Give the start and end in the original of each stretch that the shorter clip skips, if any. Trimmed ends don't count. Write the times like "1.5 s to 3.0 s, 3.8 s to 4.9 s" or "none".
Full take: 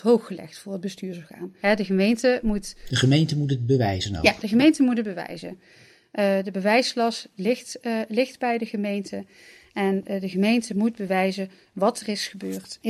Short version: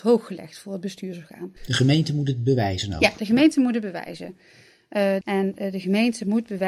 1.6 s to 2.8 s, 6.4 s to 9.7 s